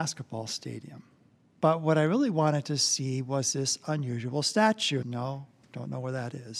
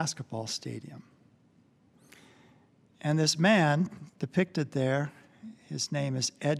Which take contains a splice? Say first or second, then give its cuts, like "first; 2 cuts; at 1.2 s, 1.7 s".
first; 2 cuts; at 1.6 s, 5.0 s